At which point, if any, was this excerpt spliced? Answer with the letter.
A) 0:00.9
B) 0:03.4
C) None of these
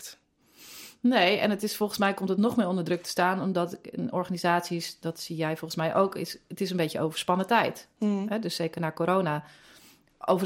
C